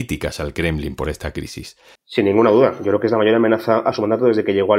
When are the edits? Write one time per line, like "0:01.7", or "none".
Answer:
0:02.0

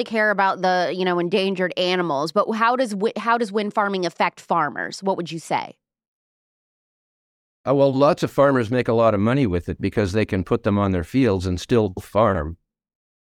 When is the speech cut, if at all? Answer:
none

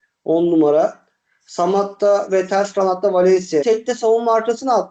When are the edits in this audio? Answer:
0:03.6

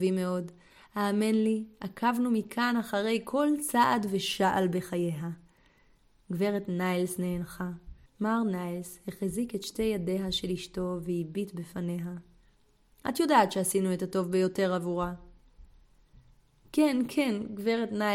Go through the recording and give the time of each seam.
0:08.1

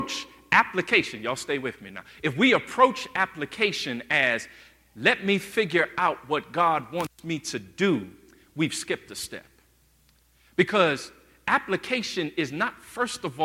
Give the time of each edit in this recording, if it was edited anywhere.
none

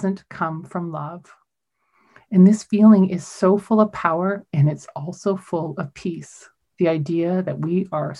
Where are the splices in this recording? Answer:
none

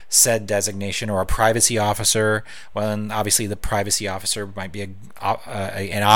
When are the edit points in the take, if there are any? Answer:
none

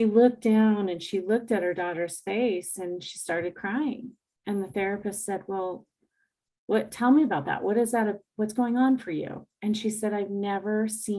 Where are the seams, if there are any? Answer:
none

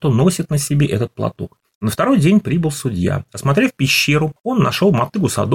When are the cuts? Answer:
0:01.6

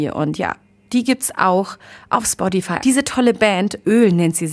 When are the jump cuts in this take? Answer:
0:02.8

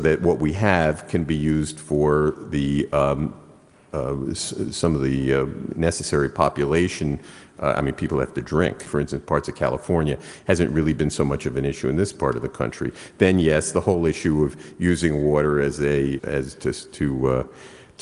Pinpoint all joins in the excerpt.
0:08.9
0:16.2

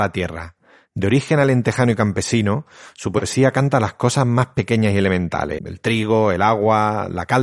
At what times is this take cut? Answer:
0:05.6

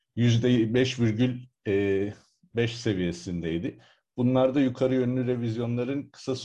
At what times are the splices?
none

